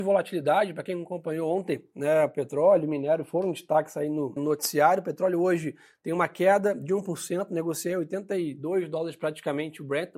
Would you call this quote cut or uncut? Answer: cut